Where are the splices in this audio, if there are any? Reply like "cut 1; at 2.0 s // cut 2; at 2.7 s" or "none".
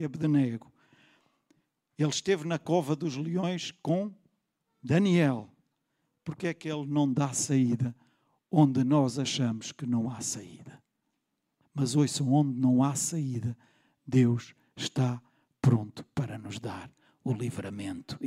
cut 1; at 11.6 s